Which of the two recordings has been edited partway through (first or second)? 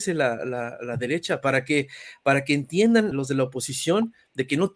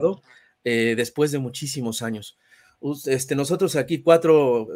first